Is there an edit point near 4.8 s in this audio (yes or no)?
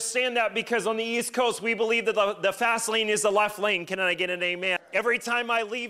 yes